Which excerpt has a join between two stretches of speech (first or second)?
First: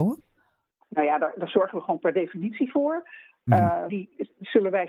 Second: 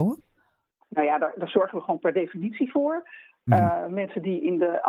first